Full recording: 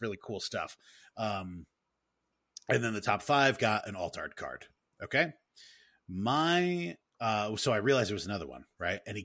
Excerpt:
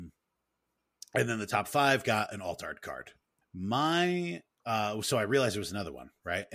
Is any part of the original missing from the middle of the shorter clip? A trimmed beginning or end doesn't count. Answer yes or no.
yes